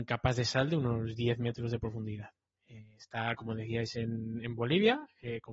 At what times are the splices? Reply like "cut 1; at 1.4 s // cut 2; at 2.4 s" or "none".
none